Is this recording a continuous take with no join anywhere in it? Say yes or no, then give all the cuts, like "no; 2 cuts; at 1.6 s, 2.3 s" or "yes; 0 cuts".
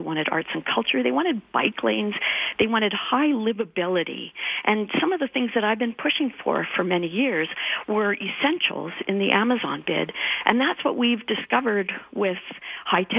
yes; 0 cuts